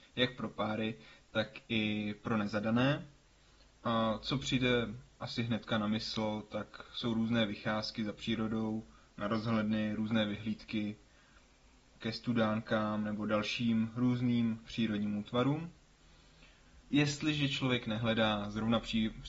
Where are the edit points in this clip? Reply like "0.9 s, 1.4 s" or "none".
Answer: 16.8 s